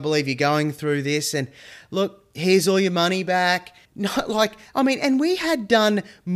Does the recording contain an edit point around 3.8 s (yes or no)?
yes